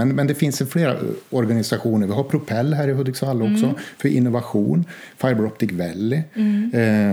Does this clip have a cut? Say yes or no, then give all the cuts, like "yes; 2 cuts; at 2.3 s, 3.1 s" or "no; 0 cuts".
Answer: no; 0 cuts